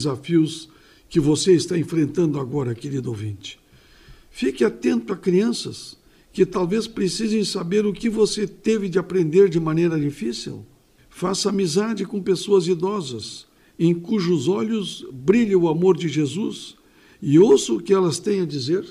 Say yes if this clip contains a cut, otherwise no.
no